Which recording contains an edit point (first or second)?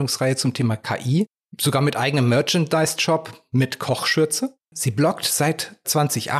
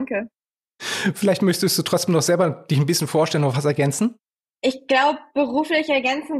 first